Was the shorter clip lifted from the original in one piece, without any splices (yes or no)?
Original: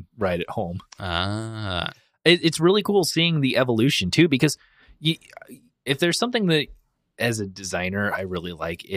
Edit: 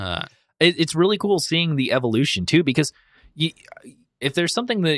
yes